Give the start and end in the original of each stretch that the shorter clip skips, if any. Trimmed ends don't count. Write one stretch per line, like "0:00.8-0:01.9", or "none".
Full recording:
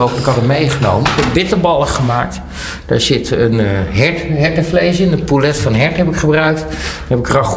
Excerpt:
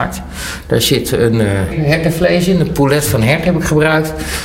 0:03.9-0:04.2